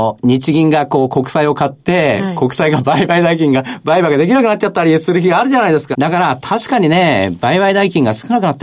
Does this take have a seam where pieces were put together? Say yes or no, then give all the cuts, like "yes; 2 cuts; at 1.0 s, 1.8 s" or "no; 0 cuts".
yes; 1 cut; at 5.9 s